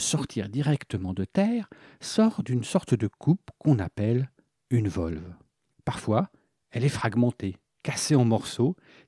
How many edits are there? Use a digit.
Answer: 1